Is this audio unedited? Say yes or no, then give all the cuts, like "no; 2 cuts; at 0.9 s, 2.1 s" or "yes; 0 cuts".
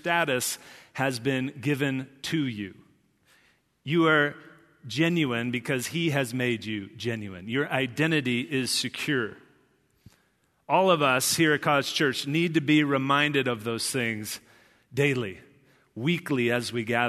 yes; 0 cuts